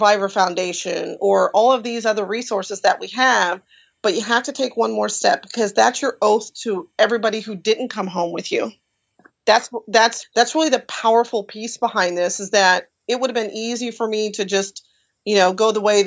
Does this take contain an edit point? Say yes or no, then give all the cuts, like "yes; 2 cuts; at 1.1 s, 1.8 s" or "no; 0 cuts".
yes; 1 cut; at 10.2 s